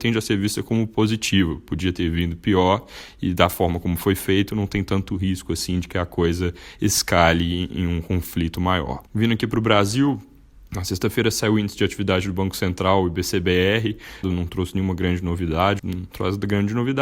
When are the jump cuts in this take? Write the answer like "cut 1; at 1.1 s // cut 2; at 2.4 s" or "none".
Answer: cut 1; at 9.1 s // cut 2; at 14.2 s // cut 3; at 15.8 s